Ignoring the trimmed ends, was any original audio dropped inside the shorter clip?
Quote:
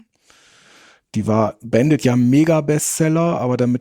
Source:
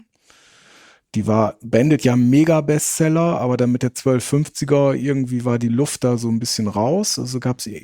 no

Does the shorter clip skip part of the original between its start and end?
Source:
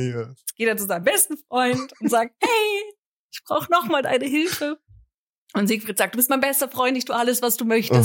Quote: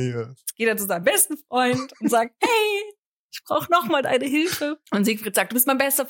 yes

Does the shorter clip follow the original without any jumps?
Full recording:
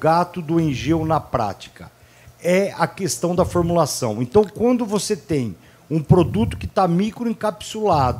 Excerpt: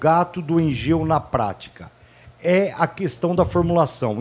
yes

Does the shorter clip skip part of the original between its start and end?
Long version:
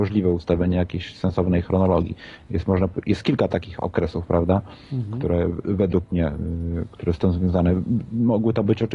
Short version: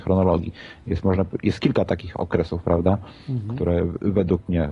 no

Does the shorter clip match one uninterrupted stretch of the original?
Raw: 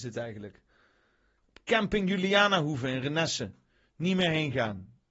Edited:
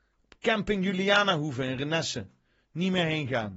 yes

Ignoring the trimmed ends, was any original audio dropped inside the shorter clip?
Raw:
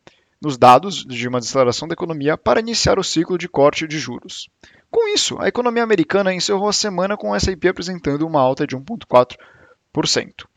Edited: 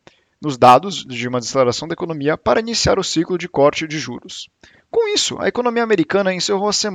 no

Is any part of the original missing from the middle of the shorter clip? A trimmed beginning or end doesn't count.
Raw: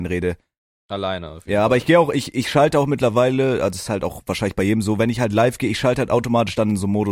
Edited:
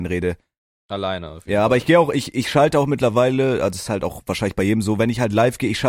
no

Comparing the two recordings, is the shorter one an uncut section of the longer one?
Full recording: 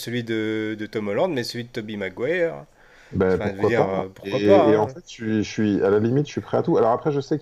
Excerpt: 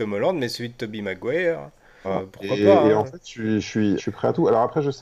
no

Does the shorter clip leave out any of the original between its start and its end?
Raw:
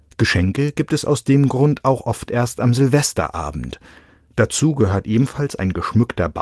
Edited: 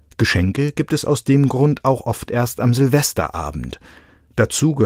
no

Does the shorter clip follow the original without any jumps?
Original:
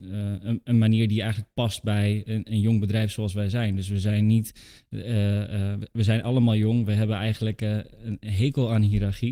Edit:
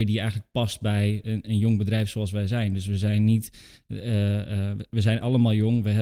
yes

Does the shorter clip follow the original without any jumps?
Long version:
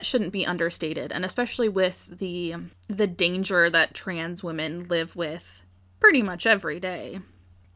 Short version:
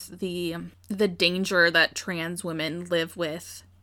yes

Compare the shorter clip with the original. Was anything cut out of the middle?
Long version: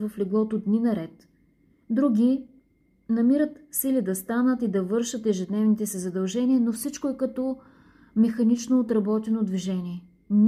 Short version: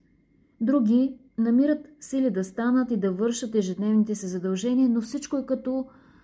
yes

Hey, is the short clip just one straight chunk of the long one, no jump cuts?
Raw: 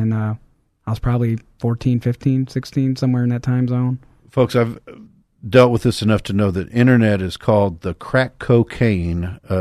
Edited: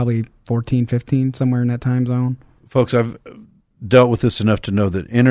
no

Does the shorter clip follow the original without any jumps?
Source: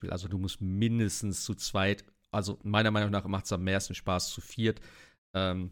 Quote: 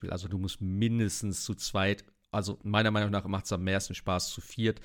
yes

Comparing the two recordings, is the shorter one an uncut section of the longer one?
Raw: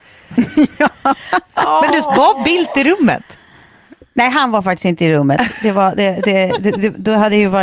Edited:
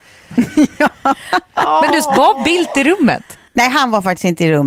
no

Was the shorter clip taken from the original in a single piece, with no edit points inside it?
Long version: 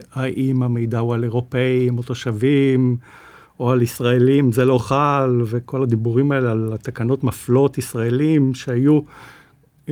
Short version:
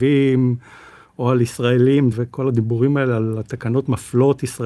no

